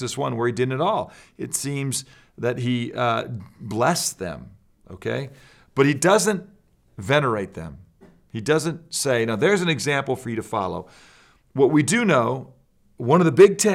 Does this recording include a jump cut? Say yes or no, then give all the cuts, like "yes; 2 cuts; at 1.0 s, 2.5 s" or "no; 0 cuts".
no; 0 cuts